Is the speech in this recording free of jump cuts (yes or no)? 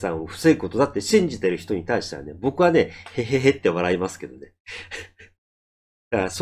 yes